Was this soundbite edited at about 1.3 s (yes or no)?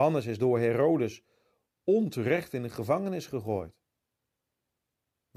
no